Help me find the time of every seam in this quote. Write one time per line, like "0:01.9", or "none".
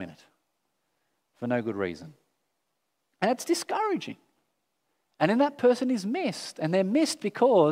none